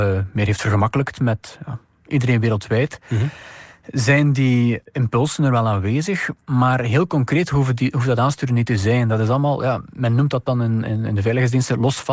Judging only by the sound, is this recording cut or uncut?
uncut